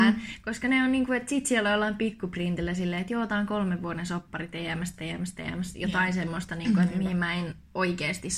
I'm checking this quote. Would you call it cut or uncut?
uncut